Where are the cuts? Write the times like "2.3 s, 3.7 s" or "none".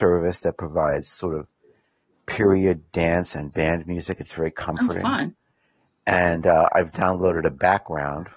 none